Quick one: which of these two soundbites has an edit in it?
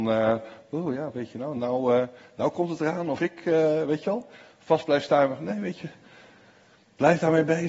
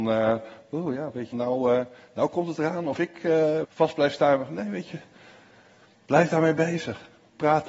second; 2 cuts; at 1.3 s, 3.6 s

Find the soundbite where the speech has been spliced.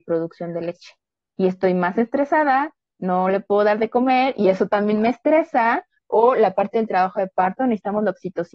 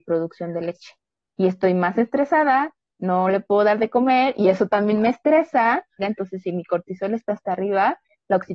second; 1 cut; at 6.0 s

